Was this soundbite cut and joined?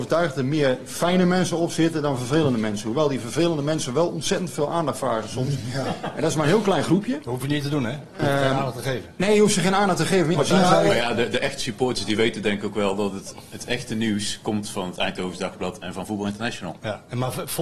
yes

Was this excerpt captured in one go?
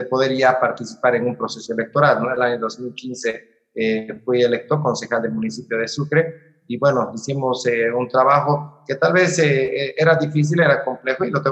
yes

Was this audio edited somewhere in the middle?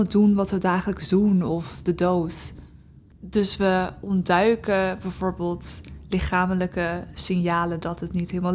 no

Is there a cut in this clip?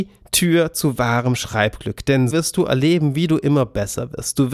yes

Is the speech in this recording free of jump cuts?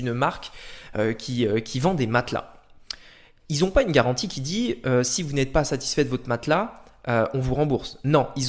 yes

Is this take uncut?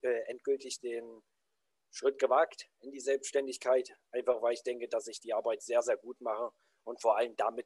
yes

